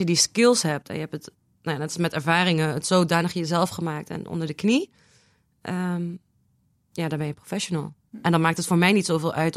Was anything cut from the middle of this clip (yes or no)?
no